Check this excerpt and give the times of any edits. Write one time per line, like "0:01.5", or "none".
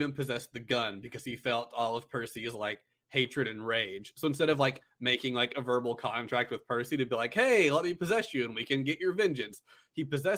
none